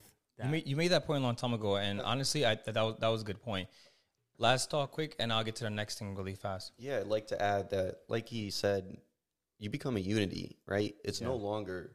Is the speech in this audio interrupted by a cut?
no; 0 cuts

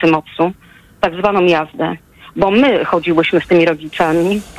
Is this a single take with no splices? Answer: yes; 0 cuts

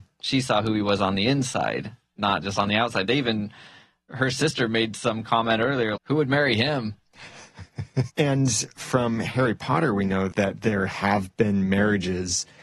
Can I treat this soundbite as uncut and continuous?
no; 2 cuts; at 6.0 s, 8.1 s

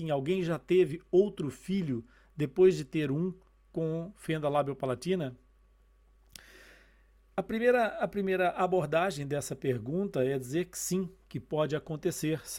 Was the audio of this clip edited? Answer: no; 0 cuts

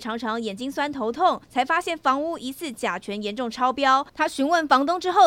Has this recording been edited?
yes; 1 cut; at 1.4 s

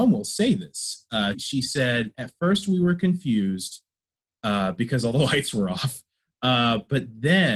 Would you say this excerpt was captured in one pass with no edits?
no; 1 cut; at 1.3 s

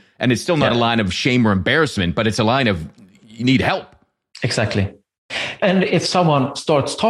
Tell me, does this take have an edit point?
no; 0 cuts

